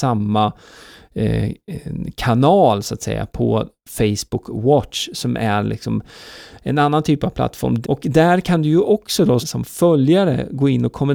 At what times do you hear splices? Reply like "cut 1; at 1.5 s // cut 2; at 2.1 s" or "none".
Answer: cut 1; at 7.8 s // cut 2; at 9.4 s